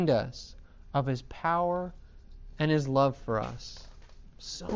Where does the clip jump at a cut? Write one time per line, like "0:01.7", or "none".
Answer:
none